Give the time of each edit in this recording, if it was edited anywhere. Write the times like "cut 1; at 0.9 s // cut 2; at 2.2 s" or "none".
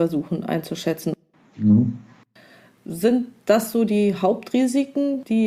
none

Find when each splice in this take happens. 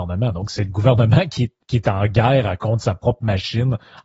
cut 1; at 1.6 s

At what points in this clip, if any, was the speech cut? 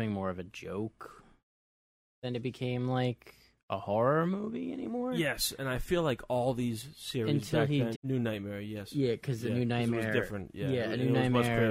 cut 1; at 7.9 s

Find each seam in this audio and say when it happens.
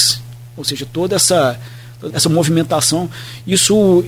cut 1; at 2.1 s

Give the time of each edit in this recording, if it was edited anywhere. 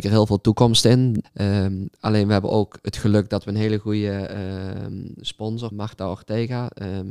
cut 1; at 1.2 s // cut 2; at 5.7 s

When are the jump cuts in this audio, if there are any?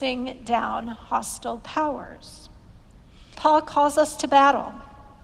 cut 1; at 3.3 s

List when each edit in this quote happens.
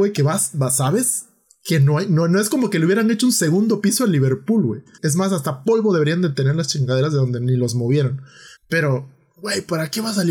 cut 1; at 5.0 s // cut 2; at 8.6 s

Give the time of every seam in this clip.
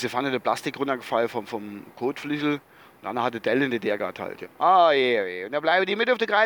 cut 1; at 4.4 s

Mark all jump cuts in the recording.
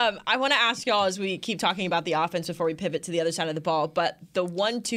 none

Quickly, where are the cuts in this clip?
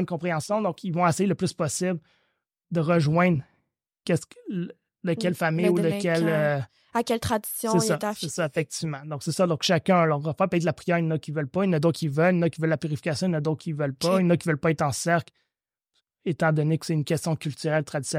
none

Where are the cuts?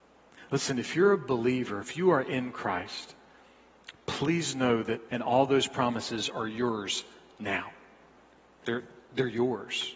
cut 1; at 5.1 s

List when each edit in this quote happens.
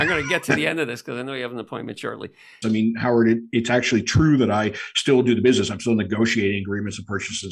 cut 1; at 2.6 s

